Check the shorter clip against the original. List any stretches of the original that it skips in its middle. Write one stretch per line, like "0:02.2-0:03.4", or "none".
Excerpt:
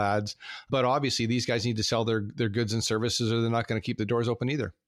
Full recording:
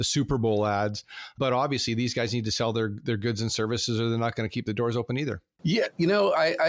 none